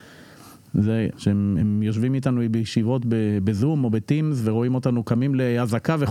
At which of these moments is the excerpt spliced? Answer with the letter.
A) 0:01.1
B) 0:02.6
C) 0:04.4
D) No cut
A